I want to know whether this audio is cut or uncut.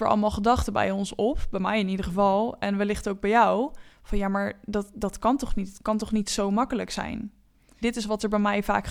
cut